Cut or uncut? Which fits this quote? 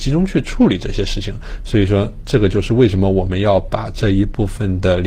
uncut